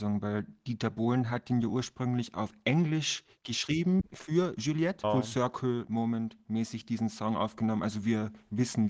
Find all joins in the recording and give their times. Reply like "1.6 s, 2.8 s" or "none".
5.0 s